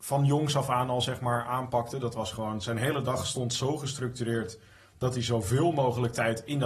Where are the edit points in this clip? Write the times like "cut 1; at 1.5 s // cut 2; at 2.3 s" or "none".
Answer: none